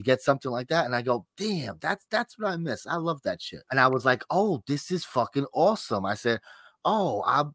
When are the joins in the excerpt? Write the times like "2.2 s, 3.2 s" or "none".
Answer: 3.6 s